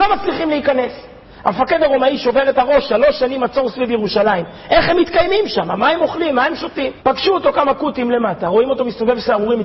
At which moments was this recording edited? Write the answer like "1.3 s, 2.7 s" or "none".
7.0 s